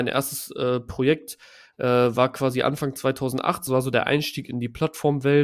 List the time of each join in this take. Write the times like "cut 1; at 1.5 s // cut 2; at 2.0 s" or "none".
cut 1; at 3.7 s